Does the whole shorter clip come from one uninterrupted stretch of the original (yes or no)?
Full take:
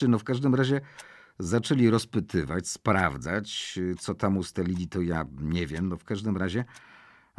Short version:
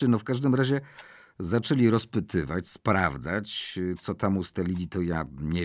yes